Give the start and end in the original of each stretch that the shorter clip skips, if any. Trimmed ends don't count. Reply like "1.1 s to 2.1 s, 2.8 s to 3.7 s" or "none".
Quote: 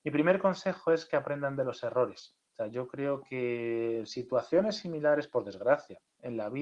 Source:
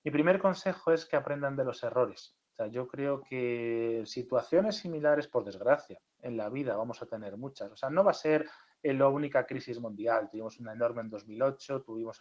none